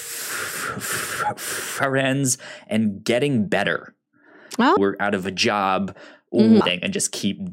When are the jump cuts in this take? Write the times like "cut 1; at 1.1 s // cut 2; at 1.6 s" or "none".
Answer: cut 1; at 4.8 s // cut 2; at 6.6 s